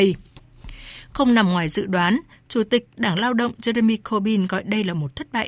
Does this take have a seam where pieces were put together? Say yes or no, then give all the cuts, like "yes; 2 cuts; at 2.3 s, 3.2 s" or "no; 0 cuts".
no; 0 cuts